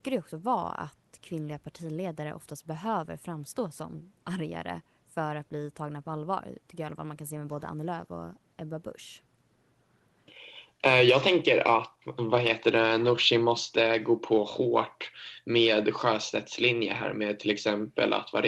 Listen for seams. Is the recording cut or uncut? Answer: cut